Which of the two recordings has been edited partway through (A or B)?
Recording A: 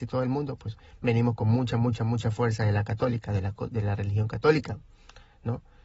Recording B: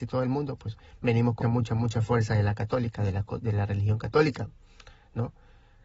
B